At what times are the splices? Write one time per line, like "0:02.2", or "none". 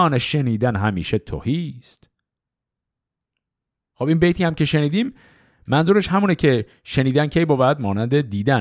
none